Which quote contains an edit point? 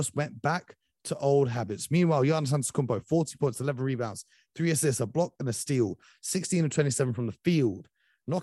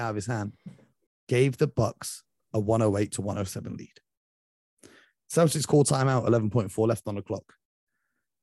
second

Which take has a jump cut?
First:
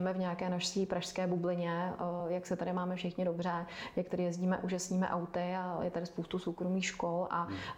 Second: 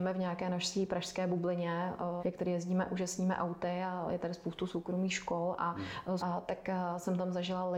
second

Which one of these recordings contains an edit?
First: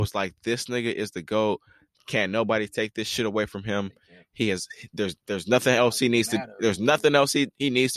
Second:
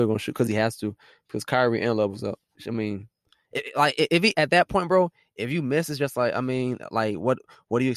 second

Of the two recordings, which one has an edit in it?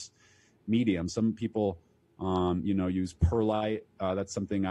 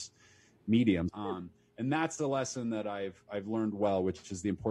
second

